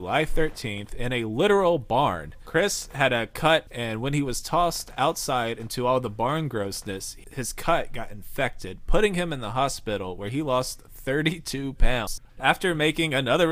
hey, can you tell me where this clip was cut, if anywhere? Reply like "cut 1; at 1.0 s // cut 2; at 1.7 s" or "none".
cut 1; at 12.3 s